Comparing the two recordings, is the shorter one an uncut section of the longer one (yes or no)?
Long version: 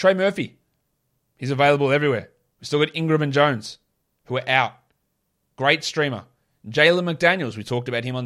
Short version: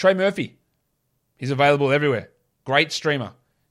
no